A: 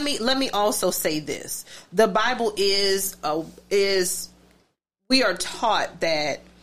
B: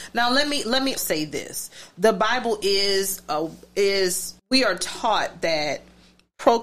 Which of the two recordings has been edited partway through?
B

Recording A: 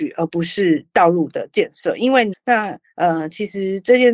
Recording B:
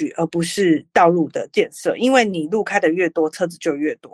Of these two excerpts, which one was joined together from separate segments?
A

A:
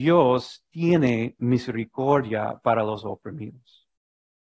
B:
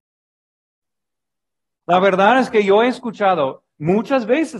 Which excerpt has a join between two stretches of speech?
B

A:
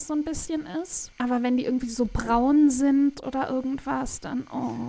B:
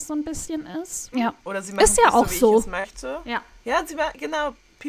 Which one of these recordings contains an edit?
B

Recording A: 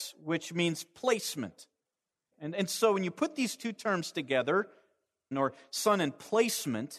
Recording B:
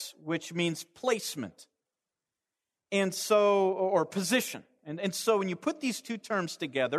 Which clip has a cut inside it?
A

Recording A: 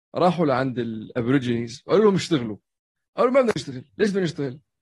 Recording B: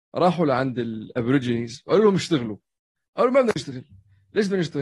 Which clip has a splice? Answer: A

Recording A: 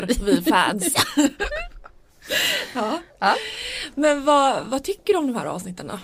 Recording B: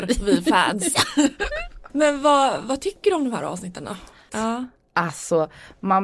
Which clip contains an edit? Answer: B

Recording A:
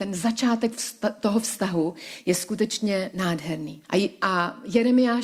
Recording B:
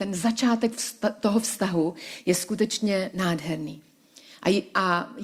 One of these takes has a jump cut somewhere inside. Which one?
A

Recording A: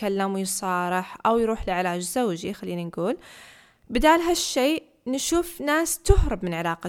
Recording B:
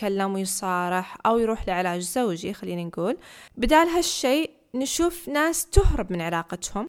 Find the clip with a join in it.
B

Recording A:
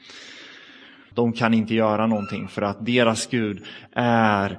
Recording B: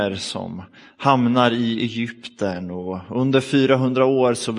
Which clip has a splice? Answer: A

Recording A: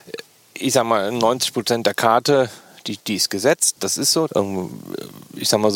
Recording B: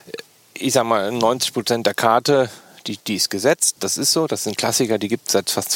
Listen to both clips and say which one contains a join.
A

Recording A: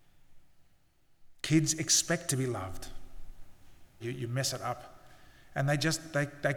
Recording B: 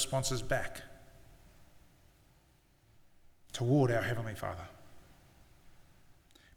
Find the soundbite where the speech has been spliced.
A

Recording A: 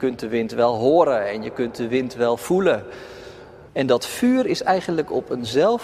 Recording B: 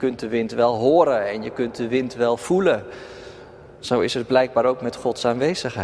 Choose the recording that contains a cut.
A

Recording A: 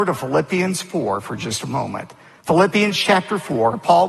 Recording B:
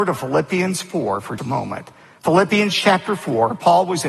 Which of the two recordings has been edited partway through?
B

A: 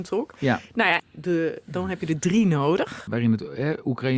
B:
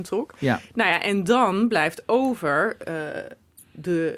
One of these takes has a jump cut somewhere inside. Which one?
A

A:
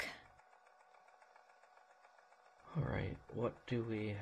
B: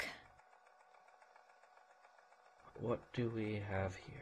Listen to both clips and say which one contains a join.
B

